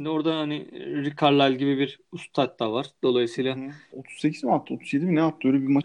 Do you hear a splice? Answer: yes; 1 cut; at 3.9 s

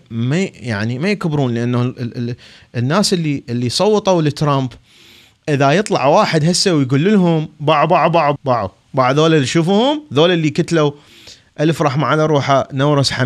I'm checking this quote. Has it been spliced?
yes; 1 cut; at 8.4 s

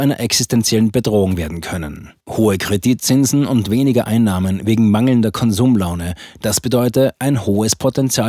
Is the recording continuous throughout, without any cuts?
no; 1 cut; at 2.2 s

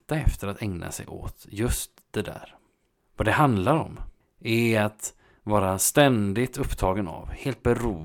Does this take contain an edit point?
no; 0 cuts

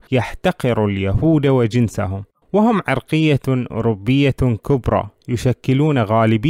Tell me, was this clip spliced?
yes; 1 cut; at 2.3 s

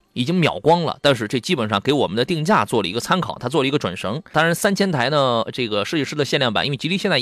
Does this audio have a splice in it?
yes; 1 cut; at 4.3 s

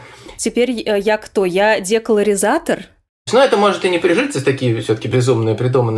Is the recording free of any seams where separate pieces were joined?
yes; 0 cuts

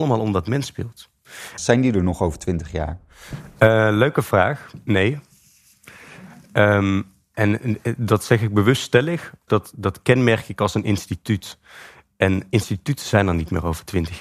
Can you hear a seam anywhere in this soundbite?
yes; 2 cuts; at 1.6 s, 9.5 s

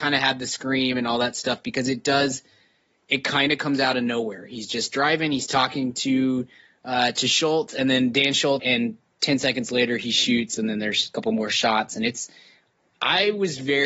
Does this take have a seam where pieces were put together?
yes; 1 cut; at 8.6 s

